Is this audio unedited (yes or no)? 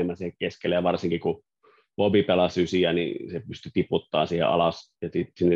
yes